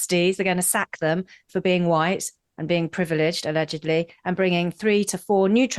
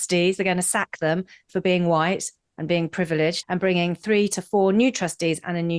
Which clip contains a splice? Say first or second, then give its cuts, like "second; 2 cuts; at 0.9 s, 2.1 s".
second; 1 cut; at 3.4 s